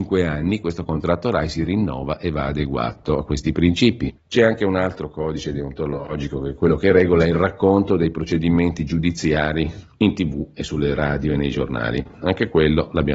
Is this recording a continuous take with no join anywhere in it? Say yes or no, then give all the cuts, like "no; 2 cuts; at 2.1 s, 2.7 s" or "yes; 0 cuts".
no; 1 cut; at 4.2 s